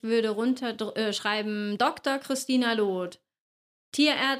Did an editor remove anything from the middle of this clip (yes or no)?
no